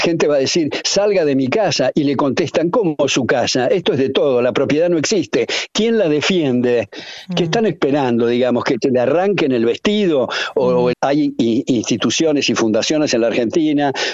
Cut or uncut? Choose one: cut